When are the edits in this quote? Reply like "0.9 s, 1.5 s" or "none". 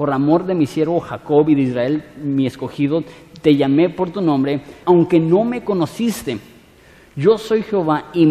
4.8 s

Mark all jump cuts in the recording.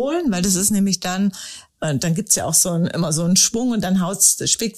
1.7 s

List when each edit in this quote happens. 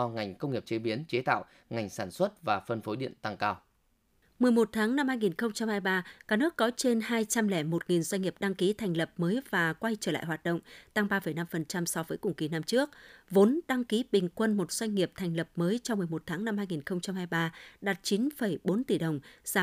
none

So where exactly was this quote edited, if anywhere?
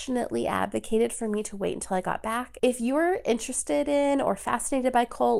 2.6 s

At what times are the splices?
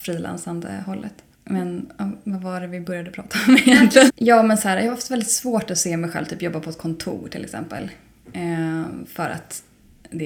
1.3 s, 4.1 s

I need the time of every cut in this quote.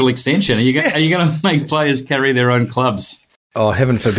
none

